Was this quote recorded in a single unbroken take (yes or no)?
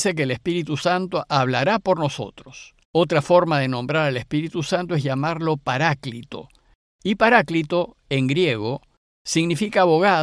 no